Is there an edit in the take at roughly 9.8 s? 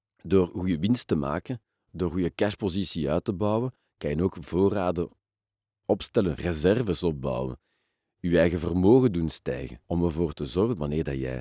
yes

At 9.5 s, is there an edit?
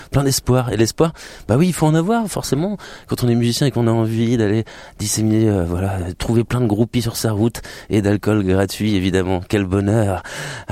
no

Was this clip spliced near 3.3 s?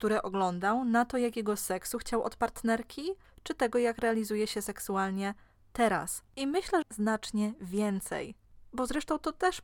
no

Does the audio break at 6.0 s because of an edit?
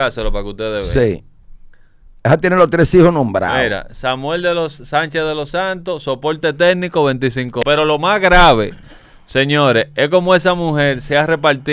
no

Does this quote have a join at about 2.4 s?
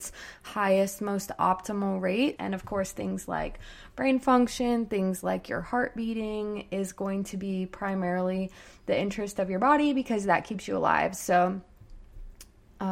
yes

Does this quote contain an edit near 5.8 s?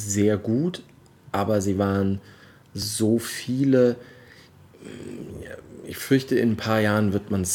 no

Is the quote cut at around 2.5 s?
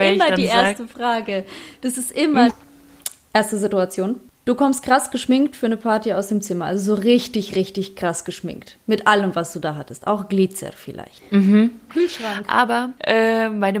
yes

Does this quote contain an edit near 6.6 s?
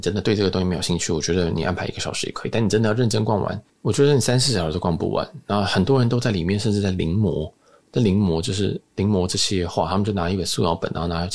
no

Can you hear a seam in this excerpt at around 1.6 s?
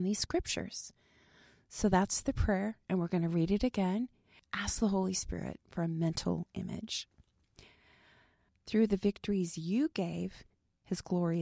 no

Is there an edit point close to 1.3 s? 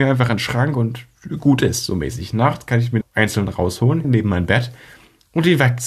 no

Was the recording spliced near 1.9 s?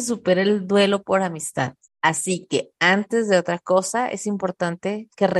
yes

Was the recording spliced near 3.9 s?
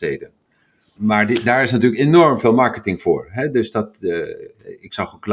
no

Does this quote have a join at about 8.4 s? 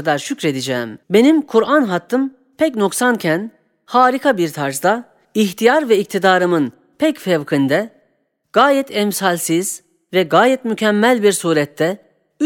no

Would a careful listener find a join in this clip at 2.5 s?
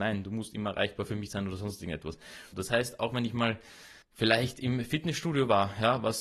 yes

